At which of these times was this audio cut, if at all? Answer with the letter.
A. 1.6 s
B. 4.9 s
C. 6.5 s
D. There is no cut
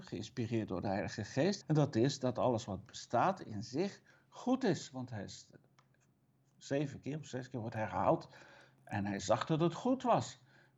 A